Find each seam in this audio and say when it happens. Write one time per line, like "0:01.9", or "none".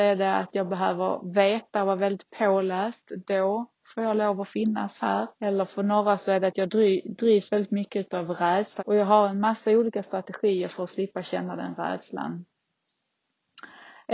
0:05.3
0:08.8